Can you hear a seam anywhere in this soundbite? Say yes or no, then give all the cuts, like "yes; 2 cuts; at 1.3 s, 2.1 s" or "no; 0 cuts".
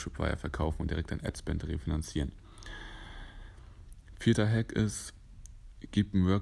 no; 0 cuts